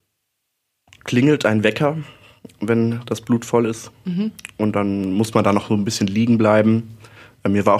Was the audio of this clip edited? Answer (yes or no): no